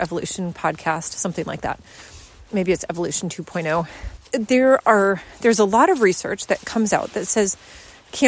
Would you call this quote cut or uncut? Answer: cut